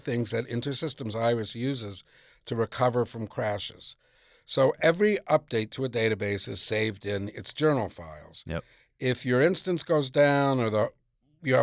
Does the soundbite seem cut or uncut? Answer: uncut